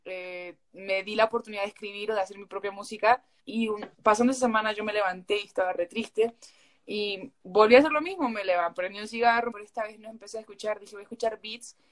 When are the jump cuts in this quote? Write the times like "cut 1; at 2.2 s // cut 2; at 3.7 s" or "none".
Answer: cut 1; at 3.4 s // cut 2; at 9.5 s